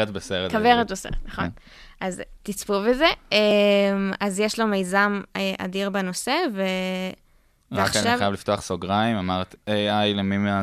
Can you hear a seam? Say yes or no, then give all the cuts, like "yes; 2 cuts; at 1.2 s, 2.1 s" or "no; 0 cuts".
no; 0 cuts